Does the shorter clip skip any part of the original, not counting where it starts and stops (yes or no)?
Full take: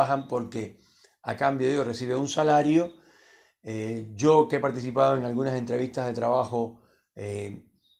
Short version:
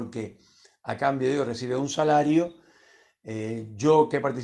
no